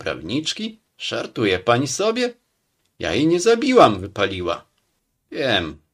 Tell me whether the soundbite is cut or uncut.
uncut